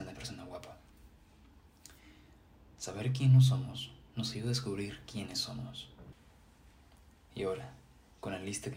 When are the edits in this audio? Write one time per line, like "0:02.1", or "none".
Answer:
none

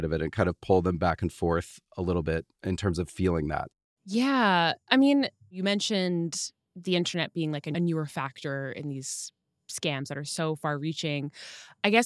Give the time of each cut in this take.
0:02.5

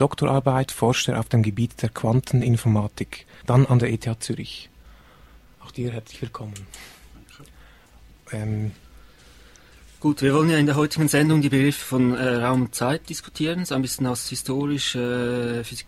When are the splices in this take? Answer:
0:03.4

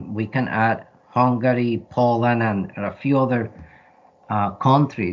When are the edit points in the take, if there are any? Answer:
none

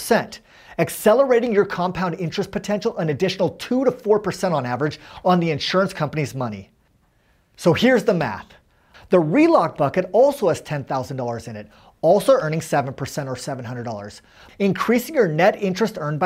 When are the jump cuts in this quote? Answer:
0:08.9
0:14.5

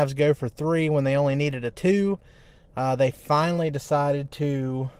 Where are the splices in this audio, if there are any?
none

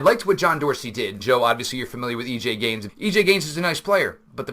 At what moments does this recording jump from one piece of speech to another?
0:01.2
0:02.9

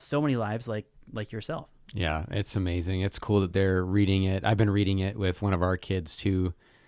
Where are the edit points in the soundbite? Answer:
none

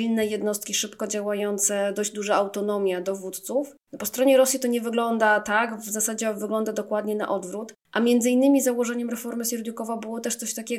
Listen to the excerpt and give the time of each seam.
none

